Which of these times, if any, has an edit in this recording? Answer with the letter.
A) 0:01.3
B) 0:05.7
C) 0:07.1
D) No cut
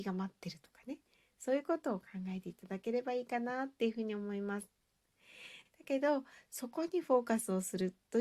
B